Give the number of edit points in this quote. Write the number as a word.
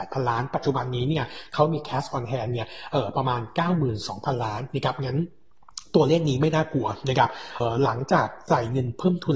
one